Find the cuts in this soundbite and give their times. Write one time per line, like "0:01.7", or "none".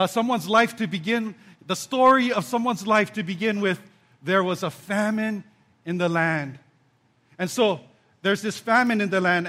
none